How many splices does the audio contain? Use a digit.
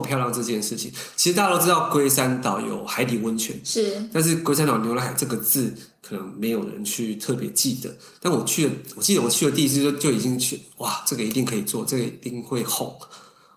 0